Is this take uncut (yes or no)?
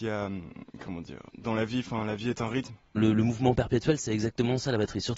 no